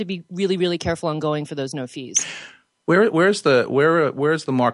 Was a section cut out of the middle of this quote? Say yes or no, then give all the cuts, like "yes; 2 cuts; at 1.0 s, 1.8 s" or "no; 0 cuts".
no; 0 cuts